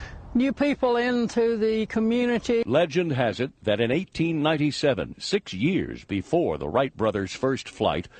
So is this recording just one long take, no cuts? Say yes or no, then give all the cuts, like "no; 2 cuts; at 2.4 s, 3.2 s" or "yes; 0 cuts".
yes; 0 cuts